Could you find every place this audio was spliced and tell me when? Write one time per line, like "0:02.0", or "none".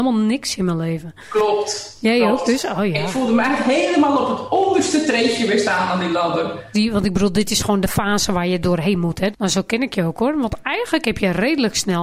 0:06.7
0:09.3